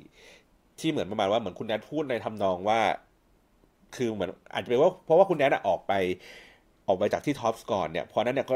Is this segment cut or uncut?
uncut